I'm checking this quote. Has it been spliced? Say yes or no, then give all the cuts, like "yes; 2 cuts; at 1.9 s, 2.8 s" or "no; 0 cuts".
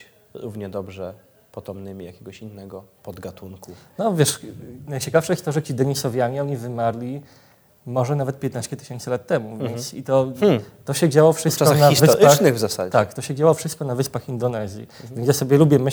no; 0 cuts